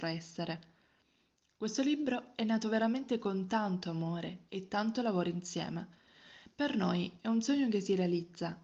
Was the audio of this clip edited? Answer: no; 0 cuts

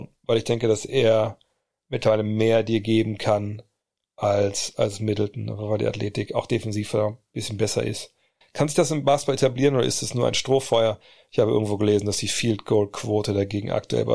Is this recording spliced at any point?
yes; 1 cut; at 8.4 s

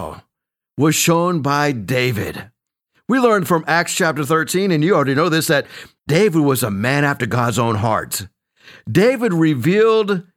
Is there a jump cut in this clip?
no; 0 cuts

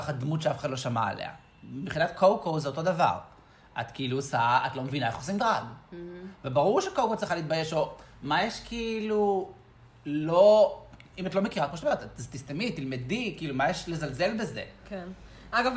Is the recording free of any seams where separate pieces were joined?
yes; 0 cuts

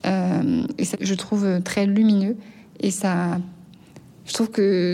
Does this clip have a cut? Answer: yes; 1 cut; at 0.9 s

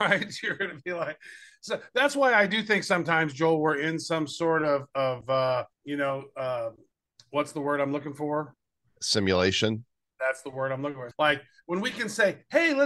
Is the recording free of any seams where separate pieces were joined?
no; 2 cuts; at 5.7 s, 11.1 s

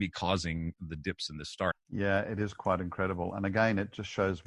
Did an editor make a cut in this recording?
yes; 1 cut; at 1.7 s

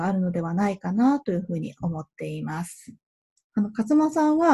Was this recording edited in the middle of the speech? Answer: yes; 1 cut; at 3.5 s

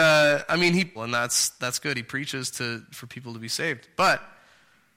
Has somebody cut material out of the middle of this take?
yes; 1 cut; at 0.9 s

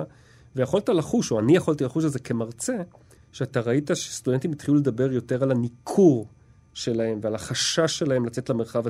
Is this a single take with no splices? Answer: no; 1 cut; at 3.2 s

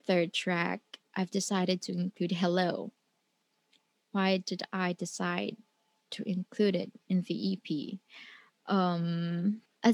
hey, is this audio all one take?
yes; 0 cuts

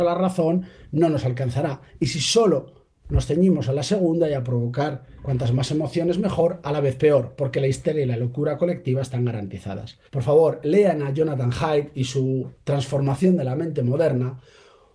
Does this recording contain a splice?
yes; 1 cut; at 10.1 s

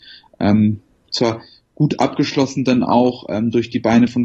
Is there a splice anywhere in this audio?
no; 0 cuts

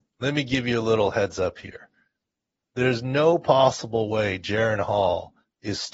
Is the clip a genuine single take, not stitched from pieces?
yes; 0 cuts

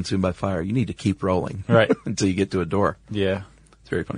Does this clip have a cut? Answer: no; 0 cuts

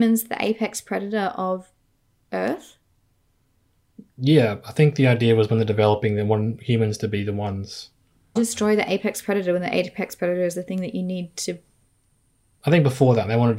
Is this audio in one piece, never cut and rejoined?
no; 1 cut; at 8.4 s

